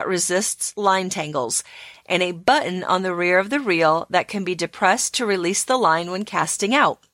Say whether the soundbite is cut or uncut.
cut